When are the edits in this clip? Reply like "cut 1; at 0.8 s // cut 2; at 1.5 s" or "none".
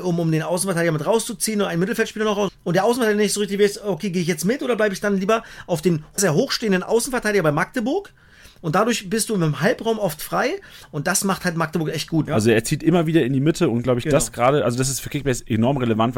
cut 1; at 2.5 s // cut 2; at 6.2 s // cut 3; at 12.3 s